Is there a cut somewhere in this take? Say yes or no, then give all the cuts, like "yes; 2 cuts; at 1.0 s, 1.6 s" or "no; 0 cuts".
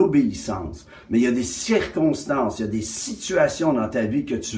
no; 0 cuts